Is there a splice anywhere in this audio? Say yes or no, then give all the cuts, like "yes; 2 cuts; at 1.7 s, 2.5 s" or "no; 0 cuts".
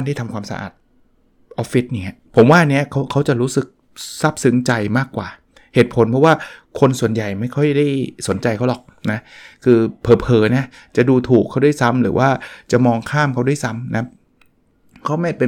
yes; 1 cut; at 2.2 s